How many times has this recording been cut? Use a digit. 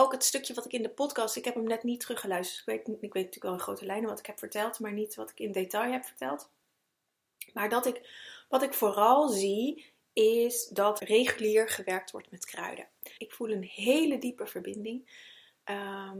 2